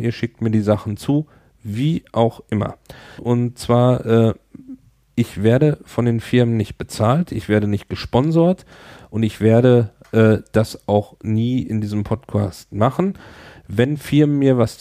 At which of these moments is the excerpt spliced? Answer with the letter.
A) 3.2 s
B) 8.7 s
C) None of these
A